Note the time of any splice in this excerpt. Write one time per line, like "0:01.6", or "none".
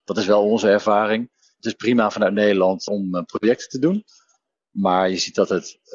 0:02.9